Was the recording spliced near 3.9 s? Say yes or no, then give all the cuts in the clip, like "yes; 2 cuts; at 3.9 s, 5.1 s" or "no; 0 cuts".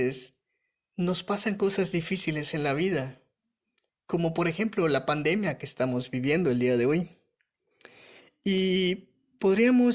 yes; 1 cut; at 3.9 s